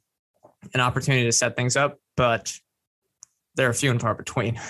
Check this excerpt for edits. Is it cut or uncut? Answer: uncut